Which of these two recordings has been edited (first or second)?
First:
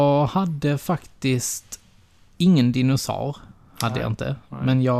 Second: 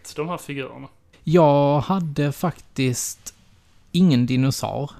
second